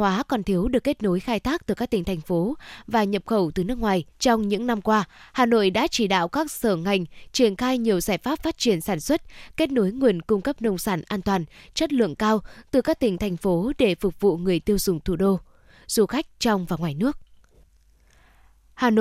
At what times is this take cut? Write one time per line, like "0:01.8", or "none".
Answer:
0:04.1